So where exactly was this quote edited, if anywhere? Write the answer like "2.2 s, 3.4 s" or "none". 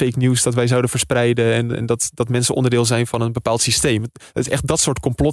none